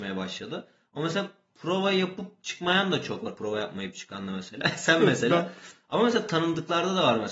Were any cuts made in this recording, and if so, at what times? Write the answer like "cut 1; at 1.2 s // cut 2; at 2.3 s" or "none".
none

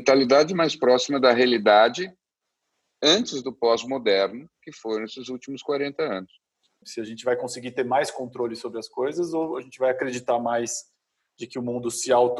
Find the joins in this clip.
cut 1; at 6.8 s

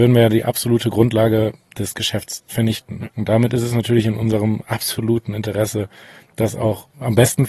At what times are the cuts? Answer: cut 1; at 3.0 s

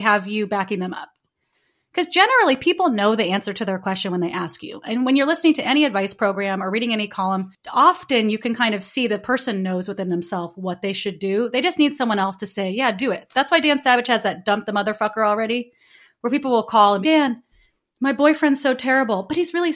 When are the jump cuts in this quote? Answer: cut 1; at 17.0 s

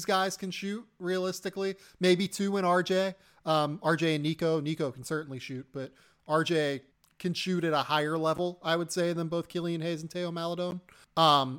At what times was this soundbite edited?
none

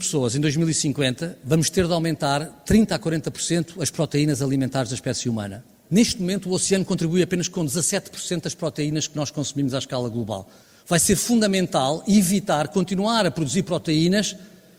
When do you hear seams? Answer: cut 1; at 5.9 s

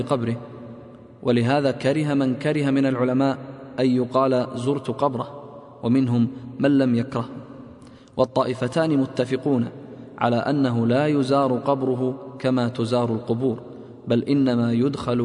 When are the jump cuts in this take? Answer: none

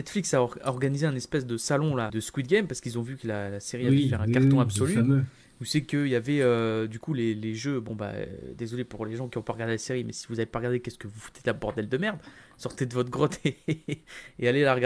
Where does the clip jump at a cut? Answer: cut 1; at 2.1 s

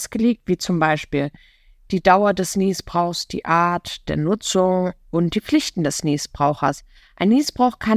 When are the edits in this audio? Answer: none

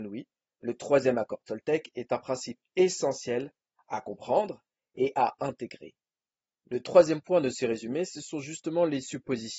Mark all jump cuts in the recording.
cut 1; at 6.6 s

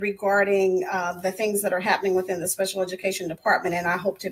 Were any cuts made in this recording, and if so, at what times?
cut 1; at 1.2 s

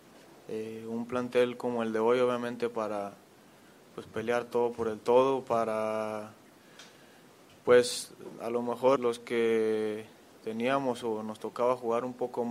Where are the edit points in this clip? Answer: cut 1; at 9.0 s

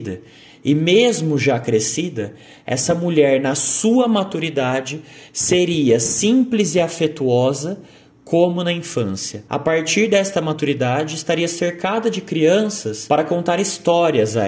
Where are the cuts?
none

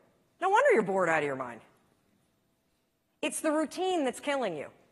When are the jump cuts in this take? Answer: none

